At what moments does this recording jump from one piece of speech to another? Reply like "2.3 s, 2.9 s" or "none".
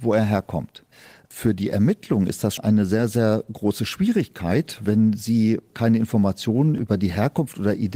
2.6 s